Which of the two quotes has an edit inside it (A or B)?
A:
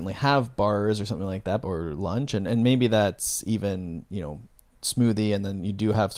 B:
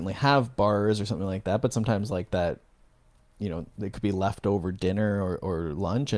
A